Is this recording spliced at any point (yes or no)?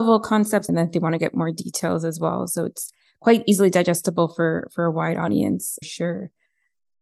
no